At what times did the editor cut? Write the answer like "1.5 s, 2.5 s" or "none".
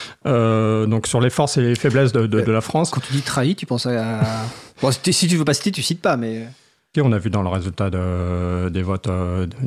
6.9 s